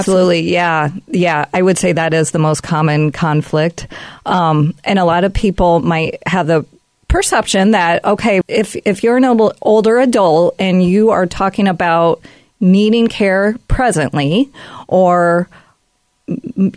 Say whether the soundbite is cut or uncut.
cut